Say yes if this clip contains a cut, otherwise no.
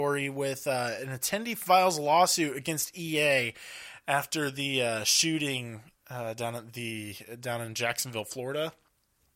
no